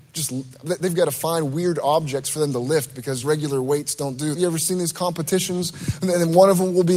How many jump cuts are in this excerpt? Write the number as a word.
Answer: two